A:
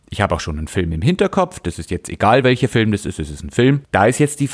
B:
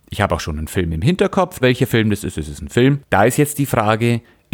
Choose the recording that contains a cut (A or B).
B